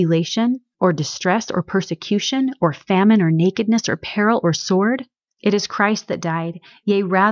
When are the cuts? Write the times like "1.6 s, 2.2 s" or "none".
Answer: 5.2 s